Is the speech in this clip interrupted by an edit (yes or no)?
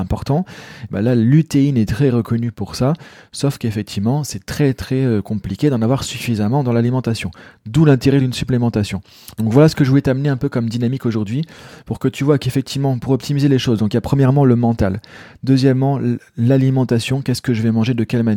no